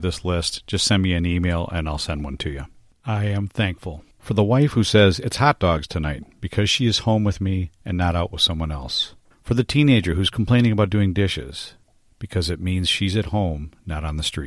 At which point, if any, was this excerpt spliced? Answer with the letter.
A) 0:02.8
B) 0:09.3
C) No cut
B